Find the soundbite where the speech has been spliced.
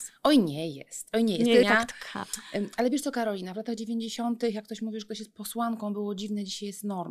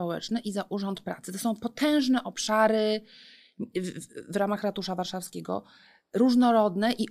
first; 1 cut; at 1.6 s

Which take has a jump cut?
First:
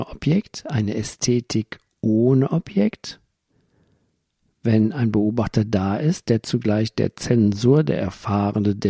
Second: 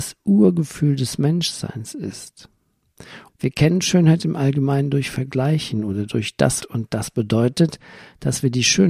second; 2 cuts; at 3.3 s, 6.6 s

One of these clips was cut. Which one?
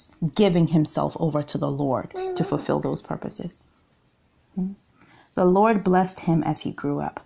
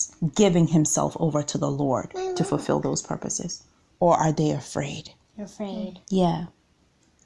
second; 1 cut; at 3.9 s

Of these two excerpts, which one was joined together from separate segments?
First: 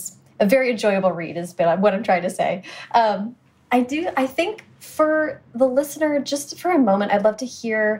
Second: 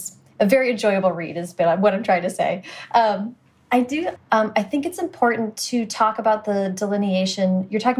second; 1 cut; at 4.2 s

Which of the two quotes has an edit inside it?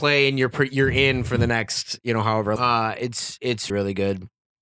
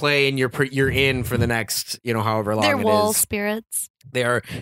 first; 2 cuts; at 2.6 s, 3.7 s

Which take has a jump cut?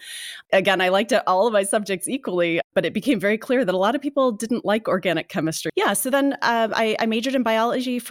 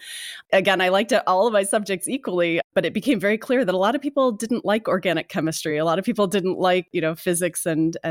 first; 1 cut; at 5.7 s

